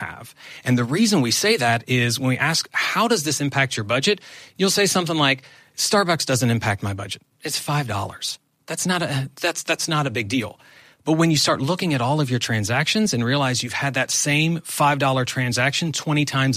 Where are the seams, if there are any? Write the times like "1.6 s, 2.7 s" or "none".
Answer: none